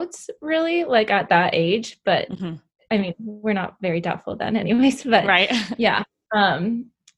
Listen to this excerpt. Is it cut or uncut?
uncut